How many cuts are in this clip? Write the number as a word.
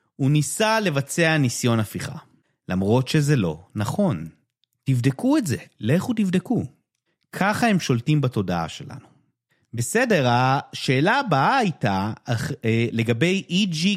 one